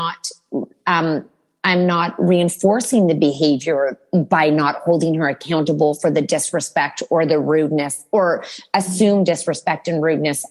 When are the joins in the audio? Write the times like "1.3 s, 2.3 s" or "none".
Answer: none